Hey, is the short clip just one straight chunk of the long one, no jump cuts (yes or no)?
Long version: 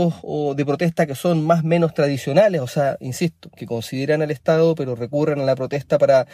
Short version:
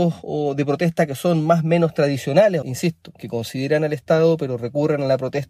no